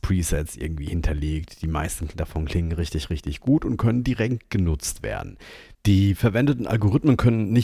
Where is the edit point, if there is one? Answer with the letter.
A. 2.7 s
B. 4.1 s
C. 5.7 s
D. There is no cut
C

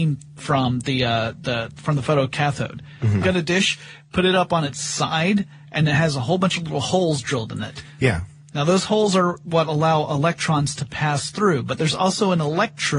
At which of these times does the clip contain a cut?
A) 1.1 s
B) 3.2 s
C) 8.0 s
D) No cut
B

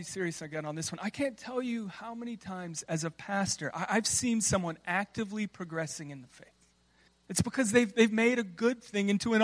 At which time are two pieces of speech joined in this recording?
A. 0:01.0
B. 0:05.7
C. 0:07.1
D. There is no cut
C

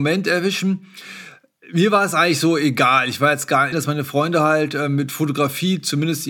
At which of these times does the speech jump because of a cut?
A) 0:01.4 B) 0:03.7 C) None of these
B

